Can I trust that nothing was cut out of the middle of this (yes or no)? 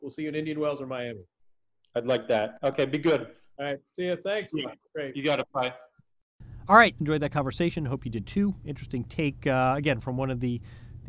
no